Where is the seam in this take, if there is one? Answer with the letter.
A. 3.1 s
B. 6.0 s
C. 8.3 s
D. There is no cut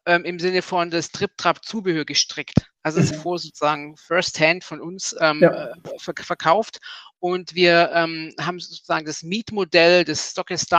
A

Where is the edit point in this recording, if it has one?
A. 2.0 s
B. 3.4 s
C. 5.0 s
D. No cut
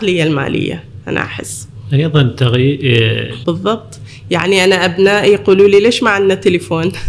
B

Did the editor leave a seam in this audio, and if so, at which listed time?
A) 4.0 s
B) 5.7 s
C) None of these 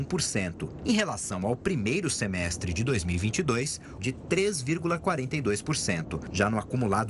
A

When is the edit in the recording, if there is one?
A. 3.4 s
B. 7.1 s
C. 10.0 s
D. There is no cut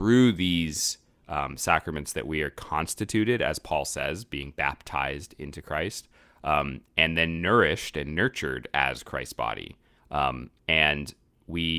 C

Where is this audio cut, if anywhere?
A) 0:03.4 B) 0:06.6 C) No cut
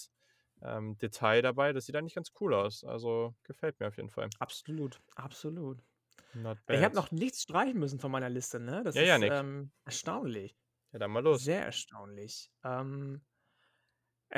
A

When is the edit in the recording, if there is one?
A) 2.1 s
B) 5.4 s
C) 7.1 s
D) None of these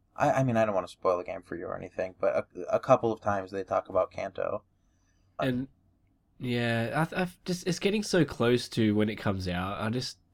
B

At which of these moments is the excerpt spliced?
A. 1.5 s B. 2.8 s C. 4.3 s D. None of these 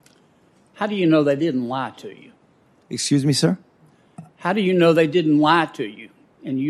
D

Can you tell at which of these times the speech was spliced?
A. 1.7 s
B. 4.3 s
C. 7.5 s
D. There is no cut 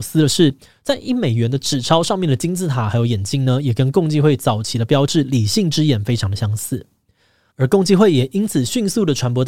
C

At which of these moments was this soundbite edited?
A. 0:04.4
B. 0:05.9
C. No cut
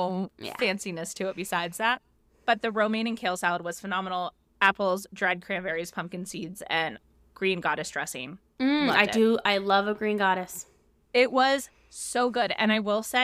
C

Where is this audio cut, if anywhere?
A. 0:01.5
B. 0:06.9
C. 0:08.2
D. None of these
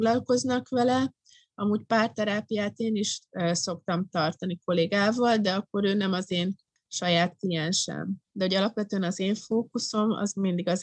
C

